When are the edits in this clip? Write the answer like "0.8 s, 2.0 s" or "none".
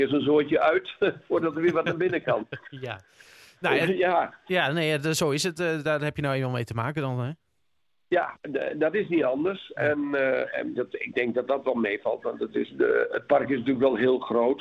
10.7 s